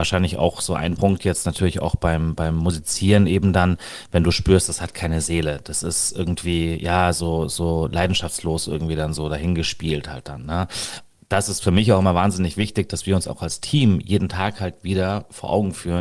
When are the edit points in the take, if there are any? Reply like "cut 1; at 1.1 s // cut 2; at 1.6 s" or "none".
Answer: none